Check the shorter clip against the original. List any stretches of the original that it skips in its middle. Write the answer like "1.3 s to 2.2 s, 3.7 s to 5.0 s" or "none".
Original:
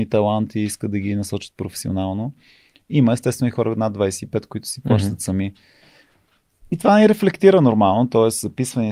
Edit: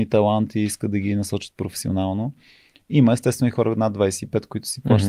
none